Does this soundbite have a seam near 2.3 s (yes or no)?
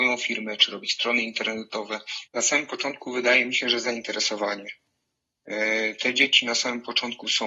yes